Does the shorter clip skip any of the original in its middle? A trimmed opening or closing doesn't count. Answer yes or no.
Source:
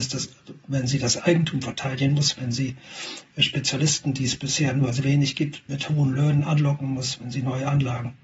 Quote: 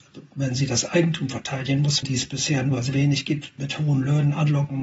yes